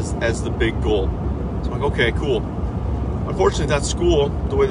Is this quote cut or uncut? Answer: uncut